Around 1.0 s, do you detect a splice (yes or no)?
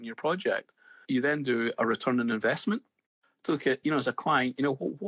yes